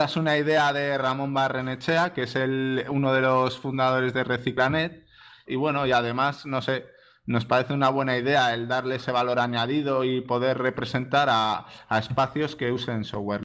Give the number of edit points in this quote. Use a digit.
1